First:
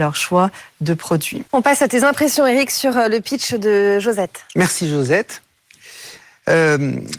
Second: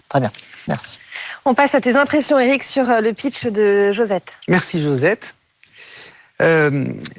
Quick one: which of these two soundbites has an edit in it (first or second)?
first